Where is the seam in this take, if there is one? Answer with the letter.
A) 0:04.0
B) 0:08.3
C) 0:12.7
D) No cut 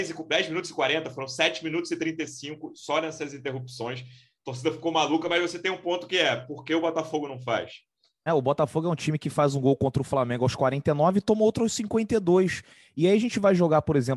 B